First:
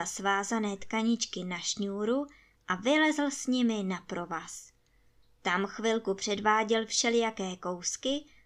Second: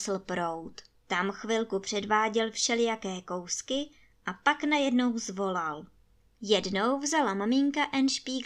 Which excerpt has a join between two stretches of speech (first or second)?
second